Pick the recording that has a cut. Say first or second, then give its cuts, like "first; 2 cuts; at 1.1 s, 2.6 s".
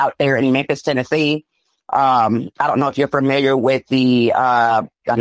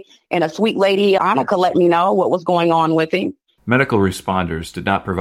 second; 2 cuts; at 1.2 s, 3.6 s